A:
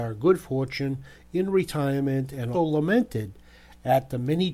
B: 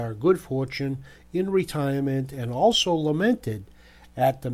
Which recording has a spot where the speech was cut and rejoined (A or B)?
A